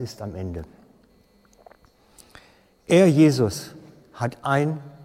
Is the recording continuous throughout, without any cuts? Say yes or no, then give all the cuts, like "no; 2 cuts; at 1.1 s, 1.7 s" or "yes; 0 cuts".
yes; 0 cuts